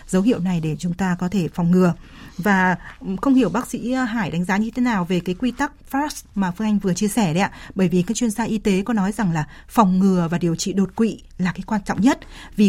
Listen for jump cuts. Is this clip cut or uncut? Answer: uncut